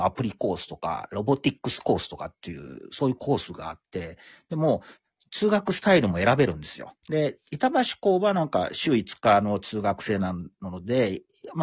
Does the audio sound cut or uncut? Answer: cut